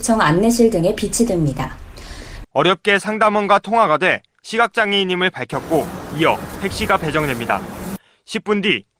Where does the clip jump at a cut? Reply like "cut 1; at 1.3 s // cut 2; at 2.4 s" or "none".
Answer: cut 1; at 2.4 s